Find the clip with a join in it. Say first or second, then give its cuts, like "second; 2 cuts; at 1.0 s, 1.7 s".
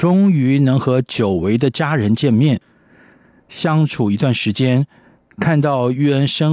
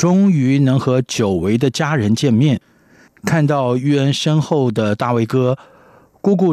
second; 1 cut; at 3.1 s